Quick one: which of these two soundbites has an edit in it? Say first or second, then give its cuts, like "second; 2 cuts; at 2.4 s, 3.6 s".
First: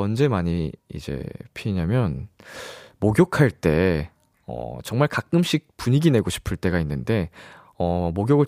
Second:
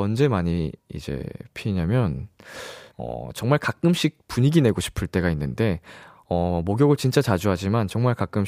second; 1 cut; at 2.9 s